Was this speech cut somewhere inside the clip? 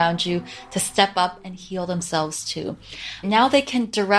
yes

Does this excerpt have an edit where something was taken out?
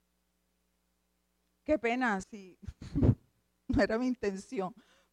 yes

